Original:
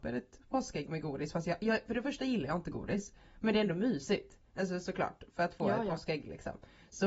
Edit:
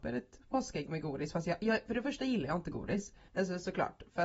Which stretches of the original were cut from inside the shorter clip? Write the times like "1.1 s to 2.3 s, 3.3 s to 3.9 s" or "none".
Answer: 3.3 s to 4.5 s